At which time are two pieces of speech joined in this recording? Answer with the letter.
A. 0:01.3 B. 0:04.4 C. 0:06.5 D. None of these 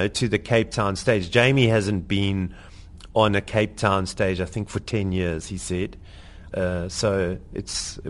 C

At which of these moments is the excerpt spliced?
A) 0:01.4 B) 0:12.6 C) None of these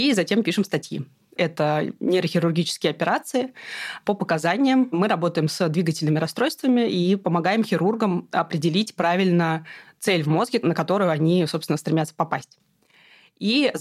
A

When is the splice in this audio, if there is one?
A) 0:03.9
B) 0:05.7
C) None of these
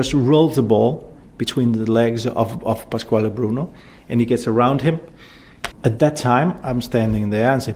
B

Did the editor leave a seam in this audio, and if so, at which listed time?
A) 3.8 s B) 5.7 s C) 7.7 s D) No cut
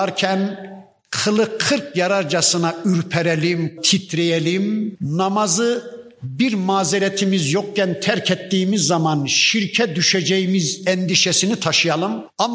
A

